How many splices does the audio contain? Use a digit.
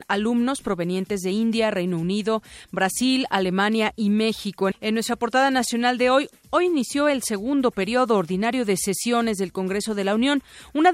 1